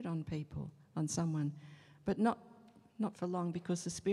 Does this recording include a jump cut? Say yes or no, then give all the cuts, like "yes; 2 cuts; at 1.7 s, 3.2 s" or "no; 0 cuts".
no; 0 cuts